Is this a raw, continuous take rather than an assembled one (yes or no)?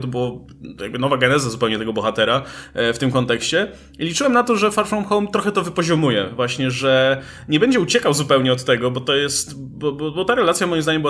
yes